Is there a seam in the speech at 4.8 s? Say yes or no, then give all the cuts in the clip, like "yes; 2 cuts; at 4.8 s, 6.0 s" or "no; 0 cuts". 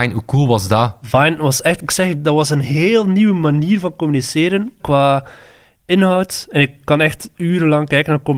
yes; 1 cut; at 4.8 s